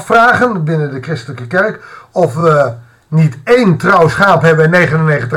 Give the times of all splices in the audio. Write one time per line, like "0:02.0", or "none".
none